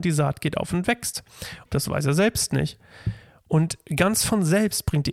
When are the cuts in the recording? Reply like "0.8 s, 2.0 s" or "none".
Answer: 1.7 s